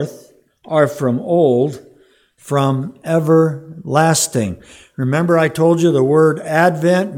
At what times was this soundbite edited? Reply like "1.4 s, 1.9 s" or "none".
none